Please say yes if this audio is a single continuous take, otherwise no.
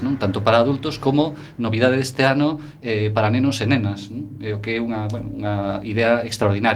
yes